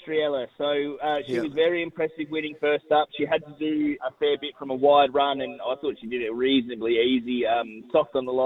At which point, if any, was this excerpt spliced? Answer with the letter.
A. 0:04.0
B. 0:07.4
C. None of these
A